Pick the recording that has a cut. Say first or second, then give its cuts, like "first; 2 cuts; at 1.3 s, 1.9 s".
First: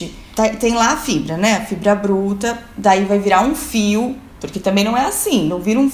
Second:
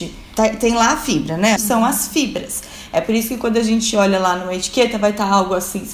second; 1 cut; at 1.6 s